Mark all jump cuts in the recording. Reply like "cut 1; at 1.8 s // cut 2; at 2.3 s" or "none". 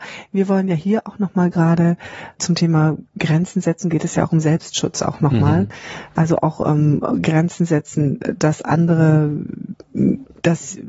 cut 1; at 2.3 s